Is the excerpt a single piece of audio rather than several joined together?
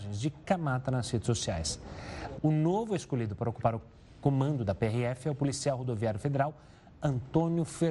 no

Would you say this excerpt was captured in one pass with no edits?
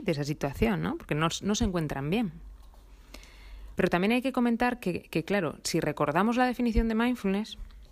no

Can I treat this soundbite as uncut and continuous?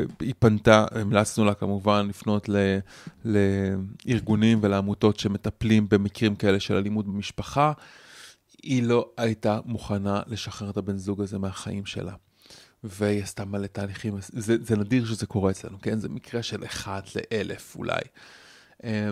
yes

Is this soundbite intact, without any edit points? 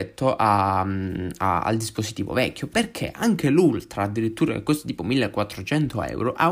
yes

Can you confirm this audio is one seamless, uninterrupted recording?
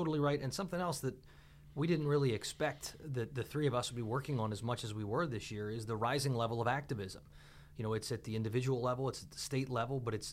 yes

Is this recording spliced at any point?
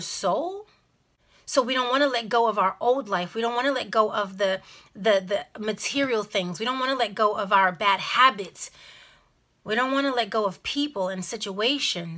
no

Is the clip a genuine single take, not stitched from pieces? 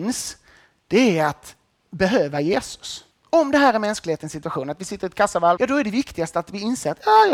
no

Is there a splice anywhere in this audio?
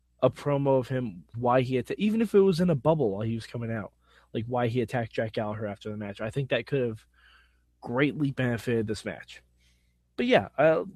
yes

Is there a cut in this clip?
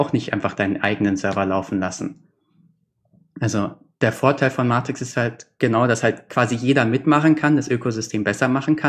no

